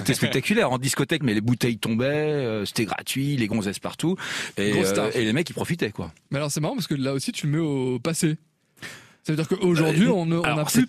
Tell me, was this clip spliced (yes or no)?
yes